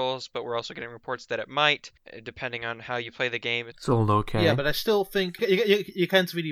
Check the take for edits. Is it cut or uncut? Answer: cut